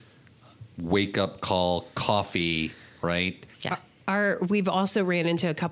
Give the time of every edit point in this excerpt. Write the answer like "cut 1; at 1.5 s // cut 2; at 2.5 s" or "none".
cut 1; at 3.5 s